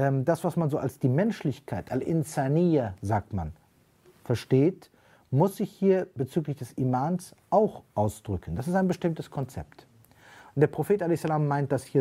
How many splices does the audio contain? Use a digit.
0